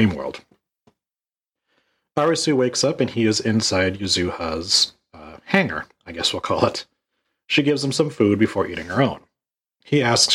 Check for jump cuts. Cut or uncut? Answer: uncut